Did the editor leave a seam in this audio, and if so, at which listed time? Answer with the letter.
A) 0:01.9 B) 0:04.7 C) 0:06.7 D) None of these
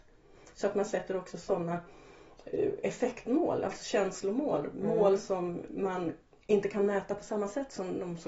D